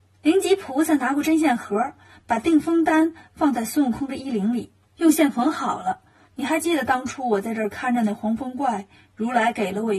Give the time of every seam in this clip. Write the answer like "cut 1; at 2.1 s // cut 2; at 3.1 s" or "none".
cut 1; at 6.2 s